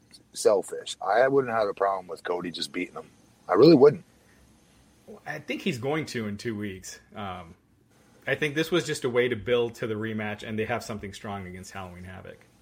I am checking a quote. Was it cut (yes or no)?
no